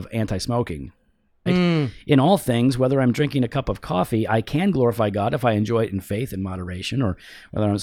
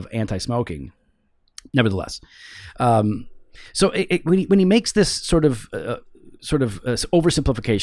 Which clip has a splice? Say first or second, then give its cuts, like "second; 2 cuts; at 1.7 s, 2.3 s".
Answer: first; 1 cut; at 1.5 s